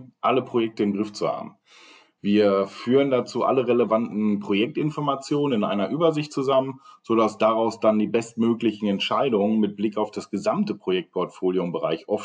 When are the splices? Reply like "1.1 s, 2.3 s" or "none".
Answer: none